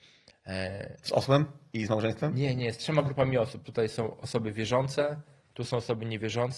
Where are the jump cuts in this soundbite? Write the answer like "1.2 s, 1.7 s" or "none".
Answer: none